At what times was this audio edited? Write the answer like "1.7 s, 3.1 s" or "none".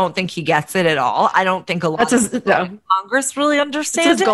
none